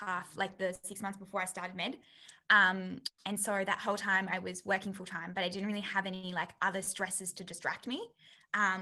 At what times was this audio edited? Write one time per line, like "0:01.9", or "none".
none

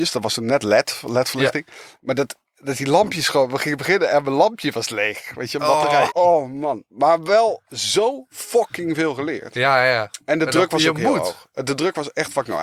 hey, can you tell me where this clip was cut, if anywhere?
0:06.1

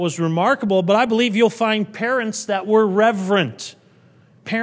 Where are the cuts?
none

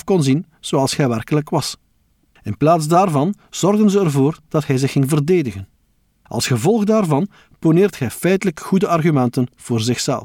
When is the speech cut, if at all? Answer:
none

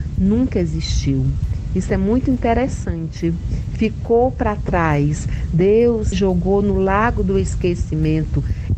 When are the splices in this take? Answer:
0:06.1

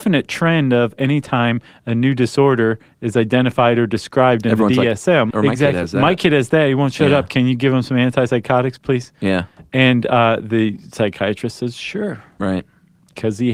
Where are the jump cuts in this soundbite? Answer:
0:05.3

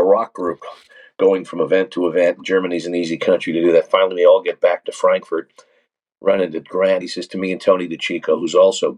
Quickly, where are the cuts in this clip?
0:07.0

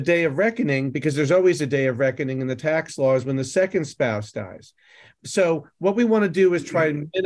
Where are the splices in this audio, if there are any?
none

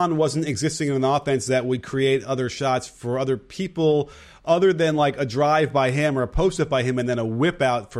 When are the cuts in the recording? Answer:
none

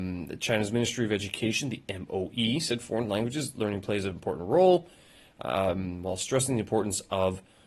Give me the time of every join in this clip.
none

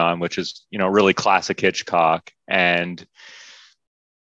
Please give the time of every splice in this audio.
none

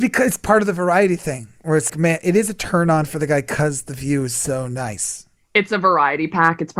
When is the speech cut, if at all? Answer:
0:01.9

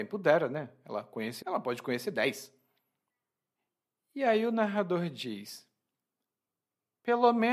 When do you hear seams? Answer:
0:01.4

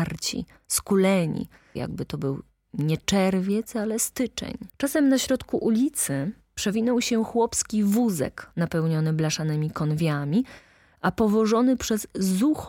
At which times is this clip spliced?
0:01.8
0:04.7

